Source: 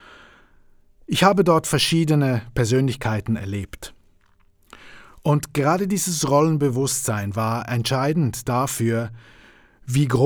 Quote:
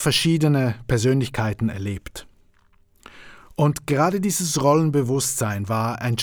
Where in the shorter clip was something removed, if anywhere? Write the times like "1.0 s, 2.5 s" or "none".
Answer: none